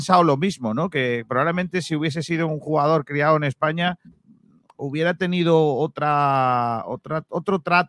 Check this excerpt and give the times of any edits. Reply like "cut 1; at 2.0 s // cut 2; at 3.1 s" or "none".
cut 1; at 4.0 s